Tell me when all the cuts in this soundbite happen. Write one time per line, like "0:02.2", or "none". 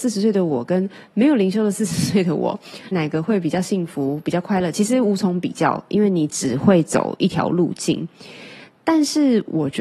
0:02.9